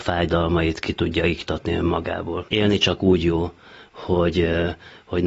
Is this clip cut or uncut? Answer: cut